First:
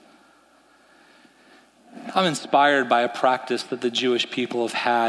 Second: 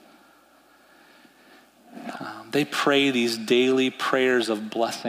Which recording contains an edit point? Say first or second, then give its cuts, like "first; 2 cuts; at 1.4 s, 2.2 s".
second; 1 cut; at 2.1 s